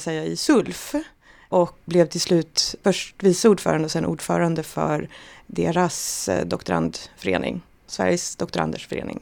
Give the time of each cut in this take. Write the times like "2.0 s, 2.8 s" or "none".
none